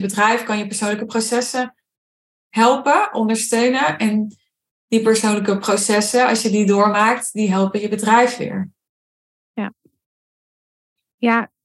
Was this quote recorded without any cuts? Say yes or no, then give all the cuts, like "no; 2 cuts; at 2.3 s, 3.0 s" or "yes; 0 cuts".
yes; 0 cuts